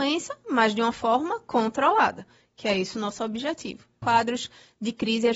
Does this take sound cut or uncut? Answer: cut